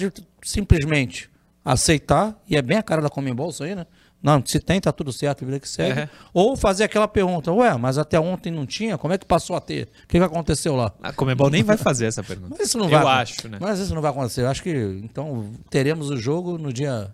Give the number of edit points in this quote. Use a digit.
0